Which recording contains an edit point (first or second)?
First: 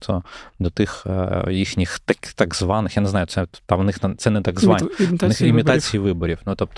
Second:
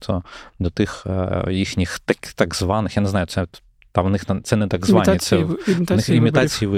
first